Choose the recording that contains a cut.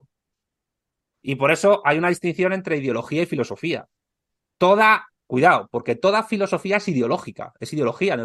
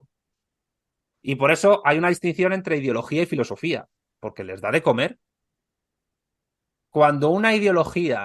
second; 1 cut; at 4.2 s

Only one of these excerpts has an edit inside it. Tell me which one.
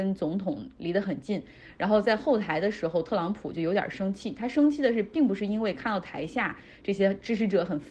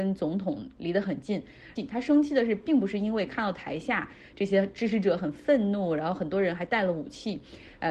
second; 1 cut; at 1.8 s

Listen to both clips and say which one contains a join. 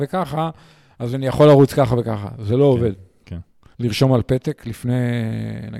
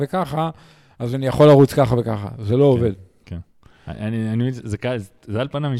first; 1 cut; at 3.7 s

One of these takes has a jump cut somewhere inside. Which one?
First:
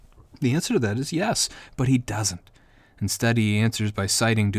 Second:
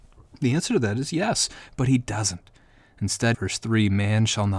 second; 1 cut; at 3.3 s

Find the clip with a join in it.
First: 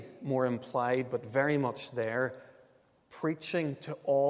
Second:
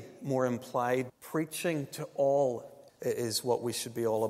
second; 2 cuts; at 1.1 s, 2.9 s

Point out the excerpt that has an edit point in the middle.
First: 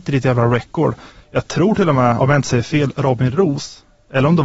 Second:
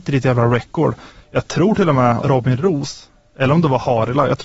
second; 1 cut; at 2.2 s

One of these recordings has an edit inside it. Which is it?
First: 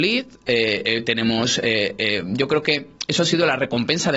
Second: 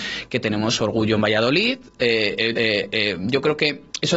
second; 1 cut; at 2.6 s

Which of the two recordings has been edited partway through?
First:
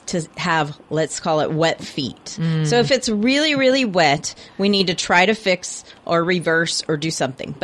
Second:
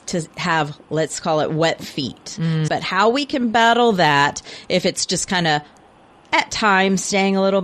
second; 1 cut; at 2.7 s

